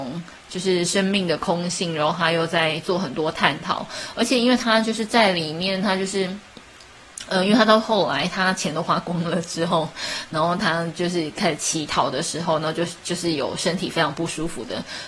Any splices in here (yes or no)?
no